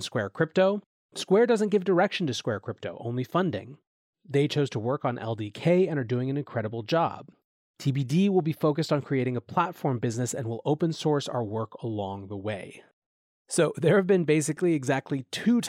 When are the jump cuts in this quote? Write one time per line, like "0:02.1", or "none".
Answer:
none